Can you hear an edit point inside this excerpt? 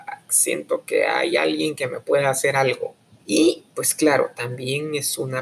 yes; 1 cut; at 3.2 s

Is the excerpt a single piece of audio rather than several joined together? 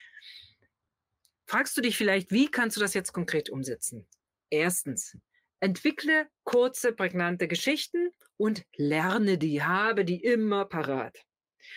yes; 0 cuts

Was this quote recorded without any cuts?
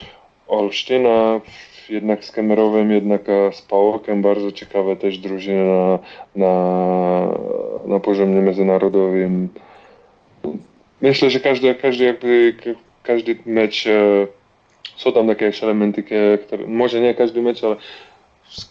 yes; 0 cuts

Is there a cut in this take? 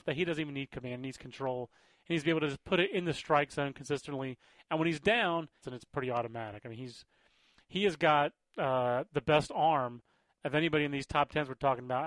yes; 1 cut; at 5.6 s

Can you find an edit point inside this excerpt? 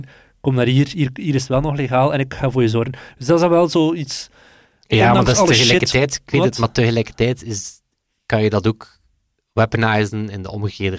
no; 0 cuts

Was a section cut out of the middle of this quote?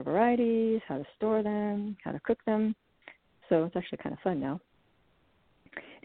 no; 0 cuts

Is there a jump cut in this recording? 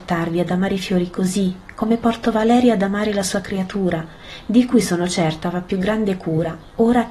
no; 0 cuts

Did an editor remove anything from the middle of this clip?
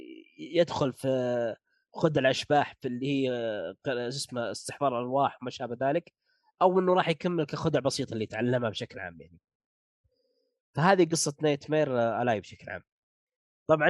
no; 0 cuts

